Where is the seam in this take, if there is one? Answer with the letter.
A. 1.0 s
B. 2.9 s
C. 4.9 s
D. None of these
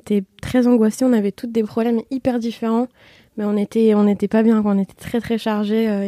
D